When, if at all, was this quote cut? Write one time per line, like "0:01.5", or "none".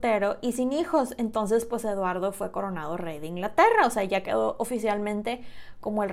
none